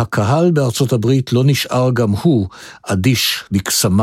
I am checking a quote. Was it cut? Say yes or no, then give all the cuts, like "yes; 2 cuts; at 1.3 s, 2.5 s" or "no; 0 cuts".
no; 0 cuts